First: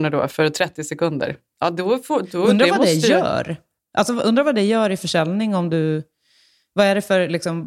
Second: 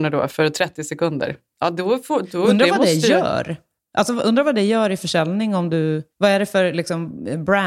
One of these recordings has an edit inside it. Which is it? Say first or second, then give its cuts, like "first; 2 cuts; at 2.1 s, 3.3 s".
second; 1 cut; at 6.1 s